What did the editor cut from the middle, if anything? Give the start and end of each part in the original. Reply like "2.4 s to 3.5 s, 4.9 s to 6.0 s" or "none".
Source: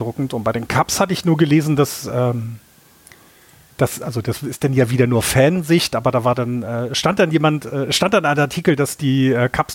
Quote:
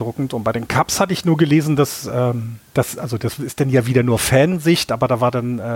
2.7 s to 3.7 s